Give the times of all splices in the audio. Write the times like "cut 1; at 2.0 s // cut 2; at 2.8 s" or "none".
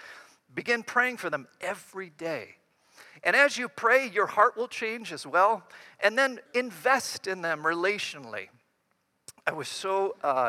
cut 1; at 6.5 s